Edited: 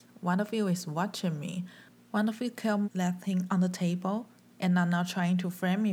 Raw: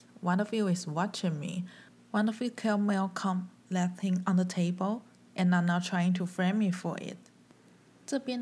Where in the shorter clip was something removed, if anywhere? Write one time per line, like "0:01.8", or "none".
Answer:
0:02.8